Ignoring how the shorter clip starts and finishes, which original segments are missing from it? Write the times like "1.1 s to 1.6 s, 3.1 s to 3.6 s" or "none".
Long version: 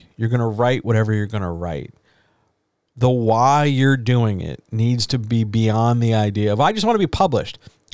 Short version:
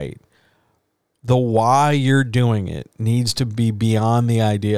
none